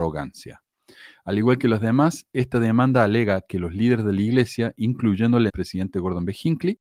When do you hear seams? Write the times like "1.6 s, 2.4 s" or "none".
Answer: 5.5 s